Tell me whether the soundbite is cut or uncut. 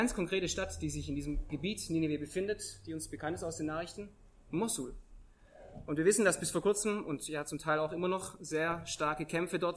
uncut